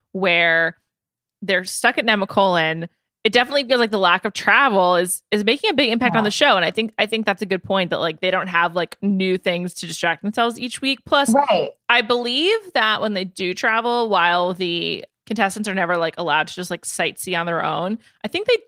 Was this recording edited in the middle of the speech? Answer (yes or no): no